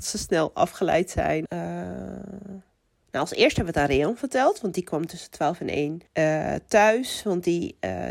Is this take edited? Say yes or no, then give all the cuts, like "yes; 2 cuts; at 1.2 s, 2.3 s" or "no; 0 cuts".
yes; 2 cuts; at 1.5 s, 6.1 s